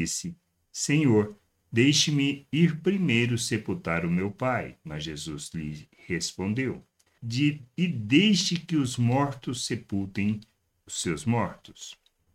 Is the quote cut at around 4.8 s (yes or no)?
no